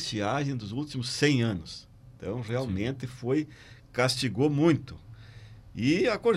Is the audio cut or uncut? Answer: uncut